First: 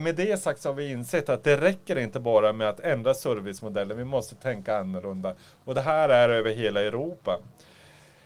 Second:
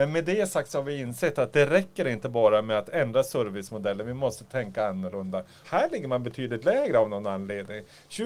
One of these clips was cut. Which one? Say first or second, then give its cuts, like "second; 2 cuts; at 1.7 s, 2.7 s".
second; 1 cut; at 5.6 s